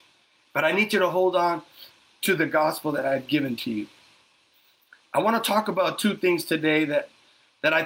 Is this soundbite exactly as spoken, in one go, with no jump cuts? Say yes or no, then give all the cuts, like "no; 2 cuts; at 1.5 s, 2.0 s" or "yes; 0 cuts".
yes; 0 cuts